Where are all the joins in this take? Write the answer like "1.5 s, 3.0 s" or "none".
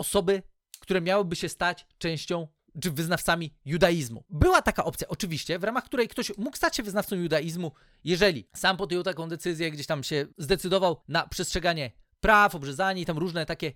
none